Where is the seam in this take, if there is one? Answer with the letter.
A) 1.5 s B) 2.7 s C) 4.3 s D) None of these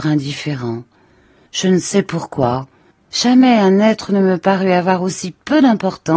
A